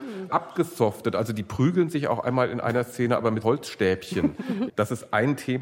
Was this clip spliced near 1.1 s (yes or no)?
no